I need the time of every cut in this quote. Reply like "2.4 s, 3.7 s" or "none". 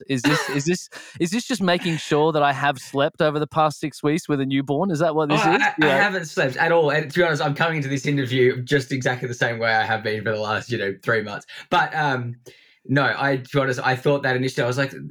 none